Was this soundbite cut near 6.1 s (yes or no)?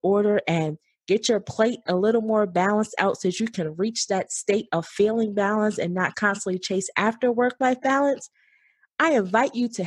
yes